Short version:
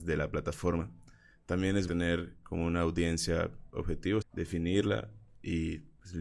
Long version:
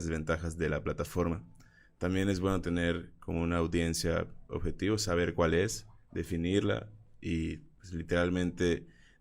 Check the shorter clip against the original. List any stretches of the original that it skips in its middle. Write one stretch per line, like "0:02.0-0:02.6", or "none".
0:02.4-0:02.6
0:05.0-0:06.0